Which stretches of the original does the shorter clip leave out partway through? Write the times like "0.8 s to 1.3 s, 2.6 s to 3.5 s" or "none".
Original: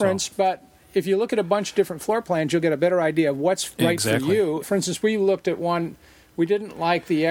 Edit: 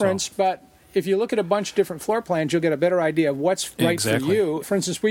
none